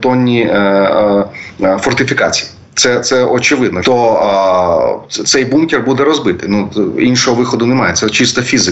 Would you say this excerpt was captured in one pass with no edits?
no; 1 cut; at 3.8 s

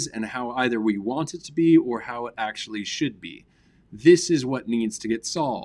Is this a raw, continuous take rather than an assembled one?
yes; 0 cuts

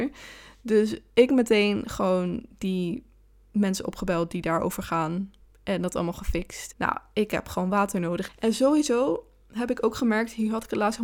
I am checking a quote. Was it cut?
yes; 2 cuts; at 6.7 s, 8.3 s

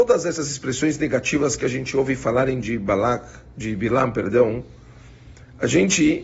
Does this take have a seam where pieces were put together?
no; 0 cuts

